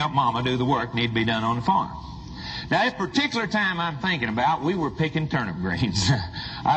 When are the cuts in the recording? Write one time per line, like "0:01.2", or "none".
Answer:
none